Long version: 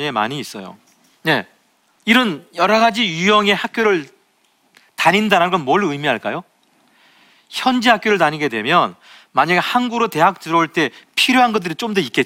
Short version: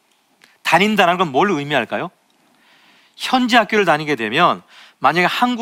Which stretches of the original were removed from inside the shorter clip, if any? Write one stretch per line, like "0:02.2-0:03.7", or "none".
none